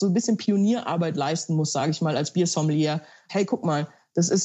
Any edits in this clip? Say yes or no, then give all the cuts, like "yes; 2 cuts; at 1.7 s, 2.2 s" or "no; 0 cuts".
yes; 1 cut; at 3.3 s